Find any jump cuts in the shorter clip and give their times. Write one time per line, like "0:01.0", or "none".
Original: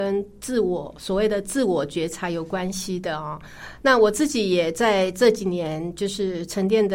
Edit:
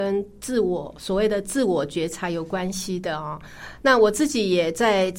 none